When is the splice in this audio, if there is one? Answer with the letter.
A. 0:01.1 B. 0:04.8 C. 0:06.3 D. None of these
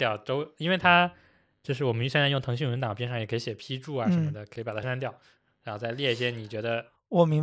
B